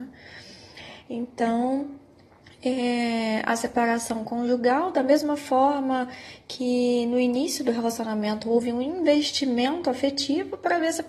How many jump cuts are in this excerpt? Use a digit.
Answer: 0